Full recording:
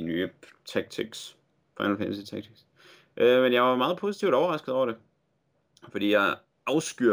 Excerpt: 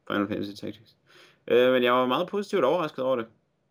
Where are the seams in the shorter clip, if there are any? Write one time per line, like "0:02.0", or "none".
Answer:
none